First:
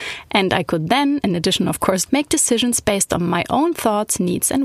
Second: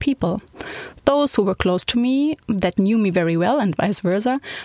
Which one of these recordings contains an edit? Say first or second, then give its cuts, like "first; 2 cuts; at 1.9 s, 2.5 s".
first; 1 cut; at 2.1 s